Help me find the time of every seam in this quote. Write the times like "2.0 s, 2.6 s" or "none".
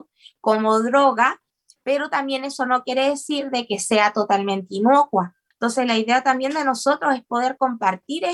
5.5 s